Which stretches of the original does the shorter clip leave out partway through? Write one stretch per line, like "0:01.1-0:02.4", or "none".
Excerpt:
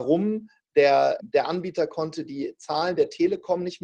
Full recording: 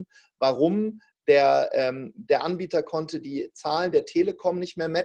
0:01.7-0:02.1